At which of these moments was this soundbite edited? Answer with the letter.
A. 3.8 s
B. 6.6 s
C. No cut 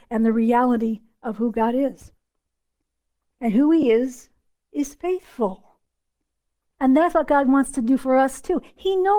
C